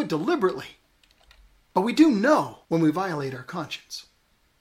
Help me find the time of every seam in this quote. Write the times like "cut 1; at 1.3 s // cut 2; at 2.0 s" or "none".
cut 1; at 2.6 s